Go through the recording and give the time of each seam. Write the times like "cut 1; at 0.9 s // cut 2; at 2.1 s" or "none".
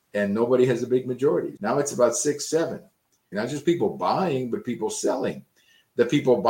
cut 1; at 1.6 s // cut 2; at 3.3 s